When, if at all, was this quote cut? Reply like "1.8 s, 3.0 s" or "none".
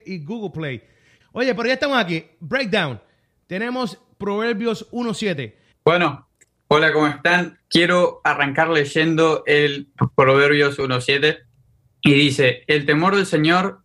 1.2 s, 5.7 s

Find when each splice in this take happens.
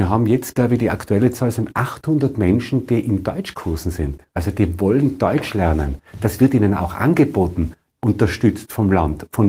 4.3 s, 7.9 s

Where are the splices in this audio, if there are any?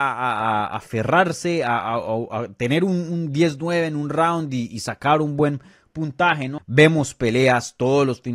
6.6 s

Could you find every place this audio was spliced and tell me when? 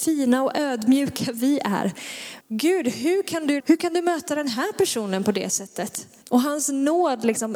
2.4 s, 3.6 s, 6.2 s

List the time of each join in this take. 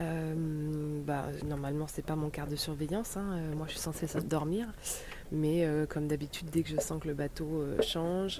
1.4 s

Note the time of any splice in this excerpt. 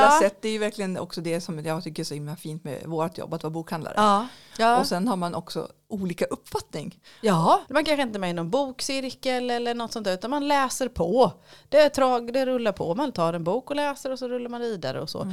4.5 s, 7.7 s

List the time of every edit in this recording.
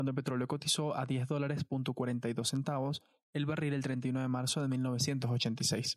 none

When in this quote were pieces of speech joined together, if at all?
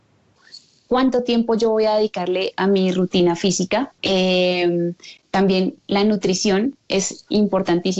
4.0 s

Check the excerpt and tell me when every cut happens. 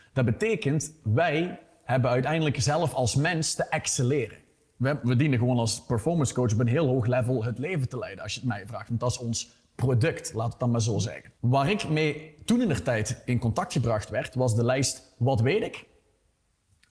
5.0 s, 11.4 s

